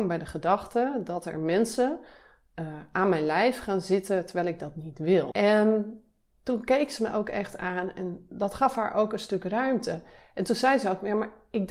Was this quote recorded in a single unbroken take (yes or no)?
no